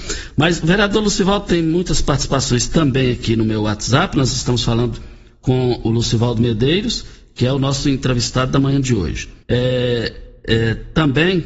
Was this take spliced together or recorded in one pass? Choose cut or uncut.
cut